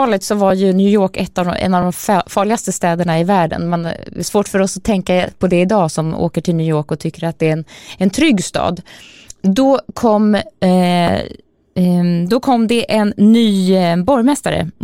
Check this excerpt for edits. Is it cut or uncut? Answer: uncut